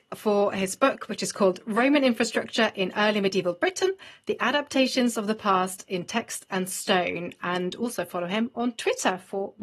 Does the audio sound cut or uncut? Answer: uncut